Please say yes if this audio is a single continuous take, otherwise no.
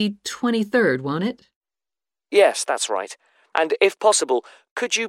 no